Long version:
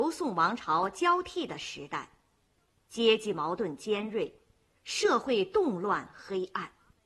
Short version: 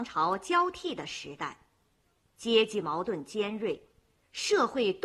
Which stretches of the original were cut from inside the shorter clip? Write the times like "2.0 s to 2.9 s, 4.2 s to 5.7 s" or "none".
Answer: none